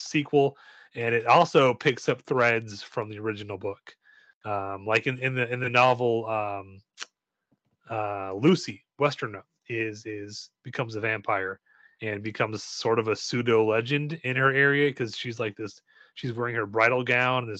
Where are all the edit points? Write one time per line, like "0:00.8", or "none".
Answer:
none

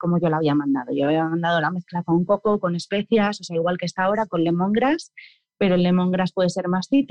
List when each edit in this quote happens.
none

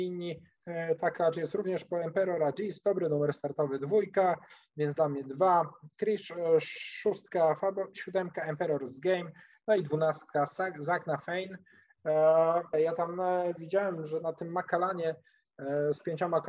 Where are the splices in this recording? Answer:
0:07.9
0:12.7

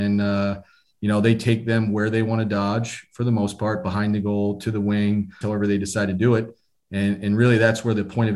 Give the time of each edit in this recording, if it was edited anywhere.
0:05.4

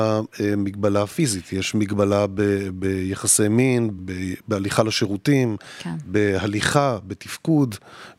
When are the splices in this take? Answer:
0:04.0

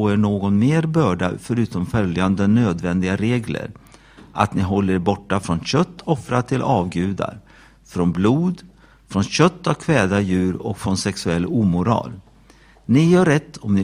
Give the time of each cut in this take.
none

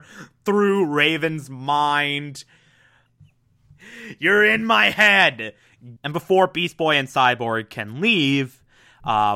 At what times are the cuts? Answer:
0:03.1
0:06.0

